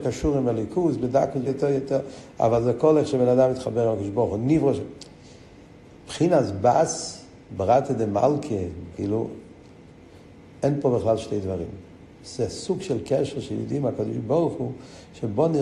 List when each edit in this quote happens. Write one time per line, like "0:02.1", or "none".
0:01.4
0:08.9